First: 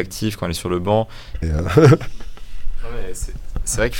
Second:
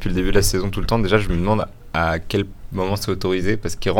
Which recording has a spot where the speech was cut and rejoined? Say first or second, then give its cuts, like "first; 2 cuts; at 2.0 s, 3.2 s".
first; 1 cut; at 1.4 s